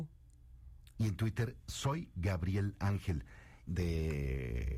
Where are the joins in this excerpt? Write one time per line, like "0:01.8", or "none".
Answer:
0:00.9
0:03.7